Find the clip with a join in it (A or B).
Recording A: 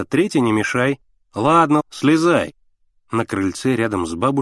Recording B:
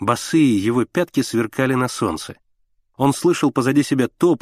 A